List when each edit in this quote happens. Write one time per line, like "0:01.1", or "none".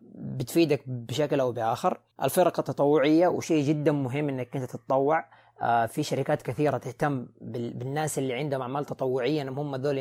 0:02.1